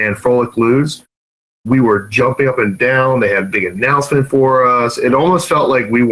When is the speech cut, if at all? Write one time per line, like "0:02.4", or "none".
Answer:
none